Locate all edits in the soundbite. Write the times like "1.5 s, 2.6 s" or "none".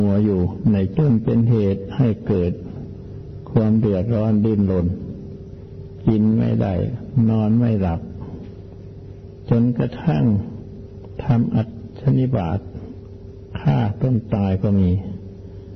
0.9 s